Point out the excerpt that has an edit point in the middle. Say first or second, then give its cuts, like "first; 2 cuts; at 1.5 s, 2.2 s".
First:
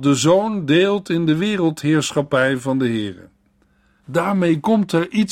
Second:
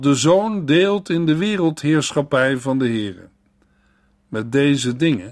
first; 1 cut; at 4.0 s